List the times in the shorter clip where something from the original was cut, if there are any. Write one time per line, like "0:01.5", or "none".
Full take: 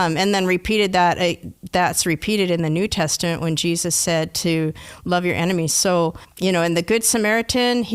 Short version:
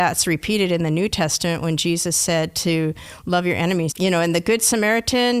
0:03.9